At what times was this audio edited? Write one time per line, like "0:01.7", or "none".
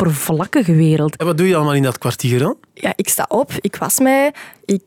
0:01.2